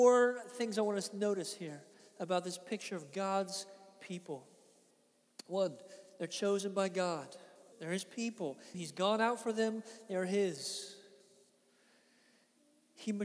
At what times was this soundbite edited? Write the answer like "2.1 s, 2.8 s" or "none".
7.7 s, 8.7 s

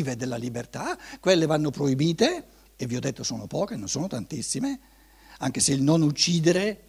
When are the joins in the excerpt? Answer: none

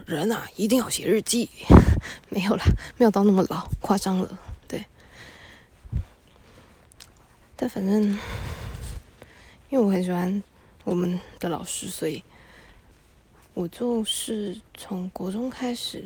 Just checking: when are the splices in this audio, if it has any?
none

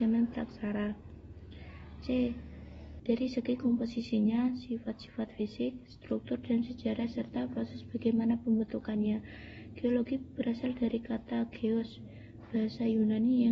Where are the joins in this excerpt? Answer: 3.0 s

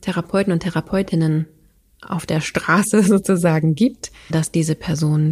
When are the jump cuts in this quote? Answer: 4.3 s

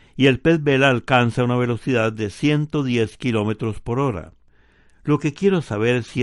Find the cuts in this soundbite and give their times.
none

